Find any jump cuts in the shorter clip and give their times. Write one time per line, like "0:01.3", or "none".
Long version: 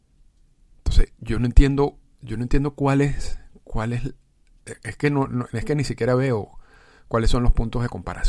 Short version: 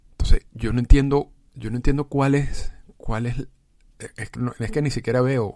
0:04.4